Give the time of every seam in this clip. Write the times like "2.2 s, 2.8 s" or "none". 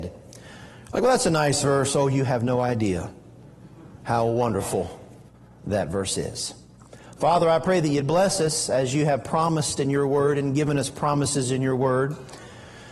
none